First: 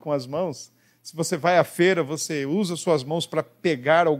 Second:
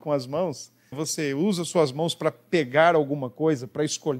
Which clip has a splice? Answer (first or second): second